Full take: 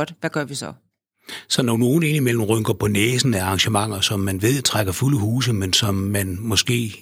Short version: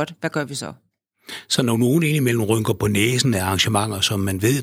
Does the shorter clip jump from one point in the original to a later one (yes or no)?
no